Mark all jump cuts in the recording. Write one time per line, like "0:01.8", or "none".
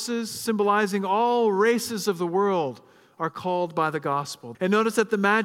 0:04.5